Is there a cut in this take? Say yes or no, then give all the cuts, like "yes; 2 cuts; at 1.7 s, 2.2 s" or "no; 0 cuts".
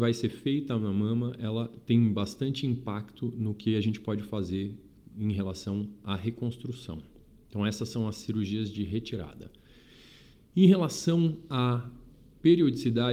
no; 0 cuts